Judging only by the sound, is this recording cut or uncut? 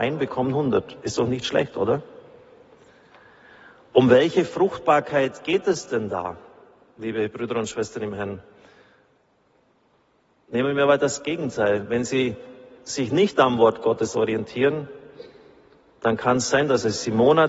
cut